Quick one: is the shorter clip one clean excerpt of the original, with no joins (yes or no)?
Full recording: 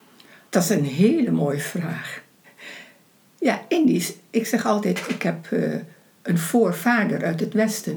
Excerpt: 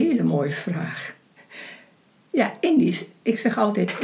yes